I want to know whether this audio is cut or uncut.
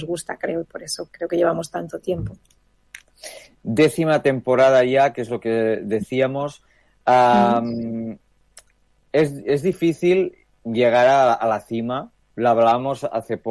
cut